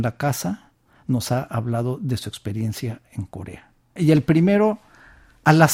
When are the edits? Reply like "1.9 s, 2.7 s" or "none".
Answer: 4.0 s

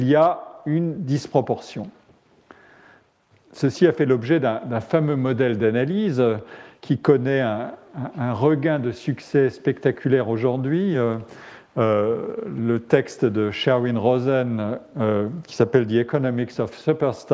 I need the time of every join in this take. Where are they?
none

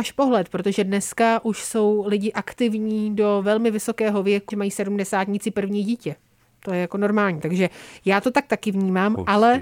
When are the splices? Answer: 4.5 s

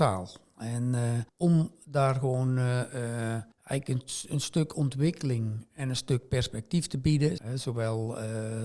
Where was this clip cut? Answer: 1.3 s, 3.5 s, 7.4 s

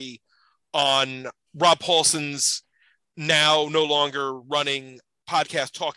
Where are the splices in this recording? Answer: 1.5 s

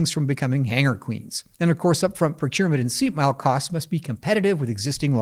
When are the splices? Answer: 1.5 s

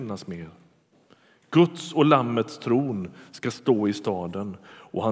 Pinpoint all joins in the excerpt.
none

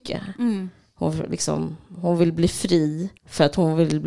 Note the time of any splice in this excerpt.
3.2 s

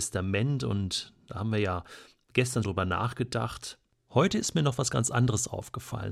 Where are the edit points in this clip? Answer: 2.6 s

